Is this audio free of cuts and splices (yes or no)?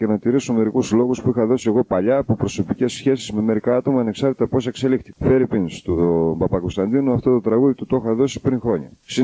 yes